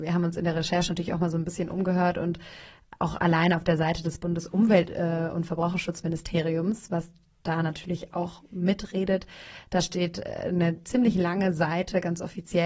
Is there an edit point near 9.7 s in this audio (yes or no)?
no